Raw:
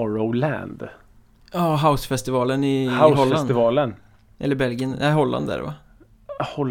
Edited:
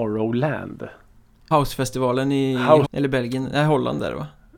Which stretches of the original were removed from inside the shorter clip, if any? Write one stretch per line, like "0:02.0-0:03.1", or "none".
0:01.5-0:01.8
0:03.2-0:04.3